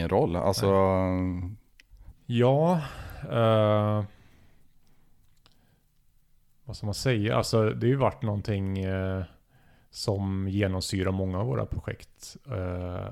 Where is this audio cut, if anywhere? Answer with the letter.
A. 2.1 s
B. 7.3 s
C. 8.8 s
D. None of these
A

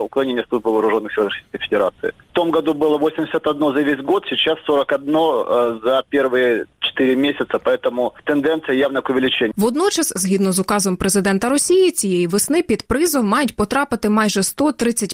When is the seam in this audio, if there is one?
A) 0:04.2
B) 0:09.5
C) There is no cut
B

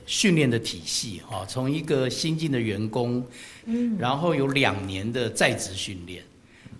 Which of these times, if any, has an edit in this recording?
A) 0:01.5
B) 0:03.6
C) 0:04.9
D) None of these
B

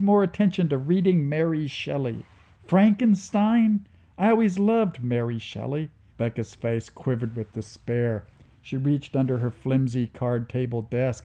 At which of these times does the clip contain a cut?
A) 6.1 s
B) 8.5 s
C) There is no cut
A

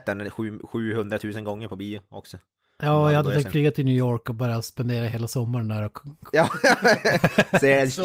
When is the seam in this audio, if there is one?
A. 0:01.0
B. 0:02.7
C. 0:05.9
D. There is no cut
D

